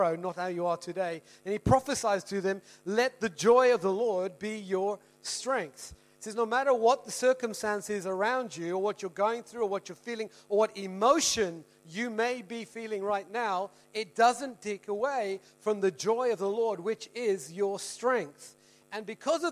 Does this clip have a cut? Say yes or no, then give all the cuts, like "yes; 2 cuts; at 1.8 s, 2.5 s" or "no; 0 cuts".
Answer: no; 0 cuts